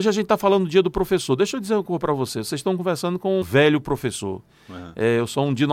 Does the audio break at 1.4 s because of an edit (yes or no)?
no